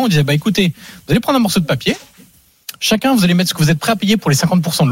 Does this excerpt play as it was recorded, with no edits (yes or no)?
yes